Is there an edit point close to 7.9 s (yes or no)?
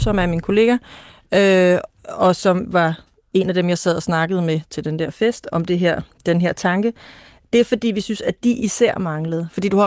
no